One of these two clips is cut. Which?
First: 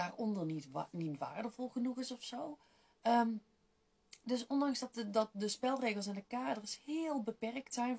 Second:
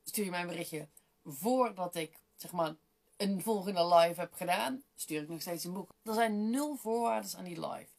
second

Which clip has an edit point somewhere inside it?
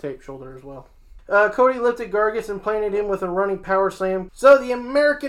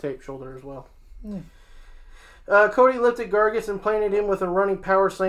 first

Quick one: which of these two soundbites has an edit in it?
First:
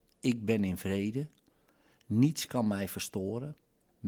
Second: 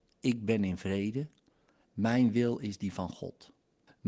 second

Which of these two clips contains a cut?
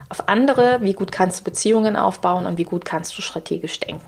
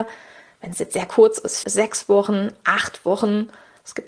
second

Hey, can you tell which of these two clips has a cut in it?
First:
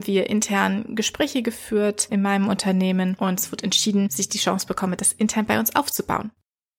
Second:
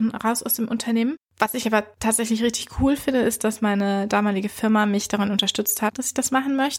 second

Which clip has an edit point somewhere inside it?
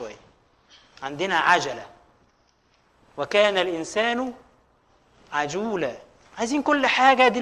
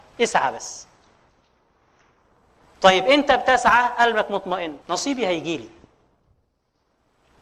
second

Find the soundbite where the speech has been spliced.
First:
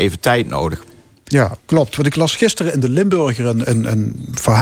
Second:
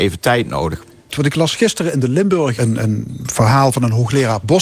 second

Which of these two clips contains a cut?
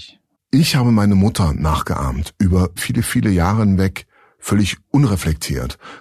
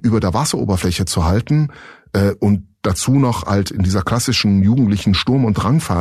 first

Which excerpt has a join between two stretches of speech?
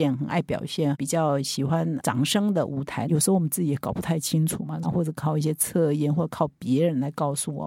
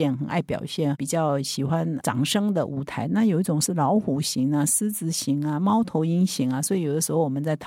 first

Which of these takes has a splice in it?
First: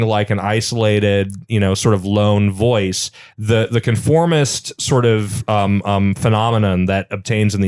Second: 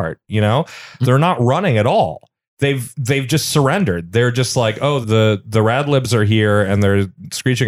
second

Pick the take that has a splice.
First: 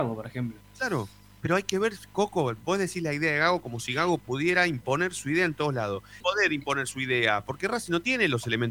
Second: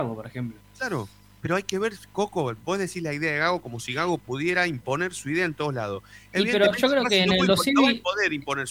first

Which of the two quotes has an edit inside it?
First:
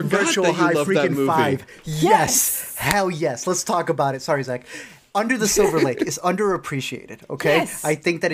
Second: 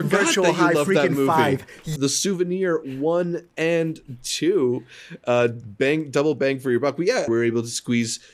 second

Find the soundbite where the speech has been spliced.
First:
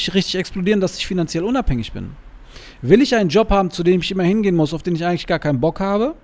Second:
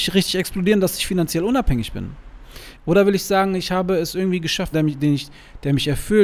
second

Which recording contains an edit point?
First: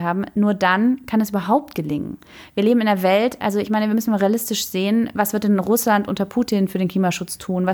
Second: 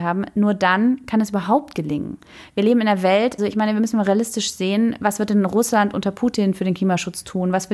second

